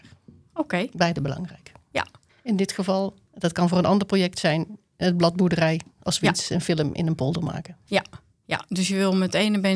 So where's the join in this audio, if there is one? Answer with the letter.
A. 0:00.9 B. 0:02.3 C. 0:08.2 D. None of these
B